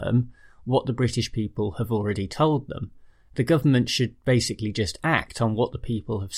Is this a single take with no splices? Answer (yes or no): yes